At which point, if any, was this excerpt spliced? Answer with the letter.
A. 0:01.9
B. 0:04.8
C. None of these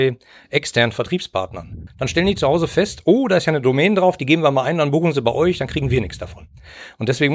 A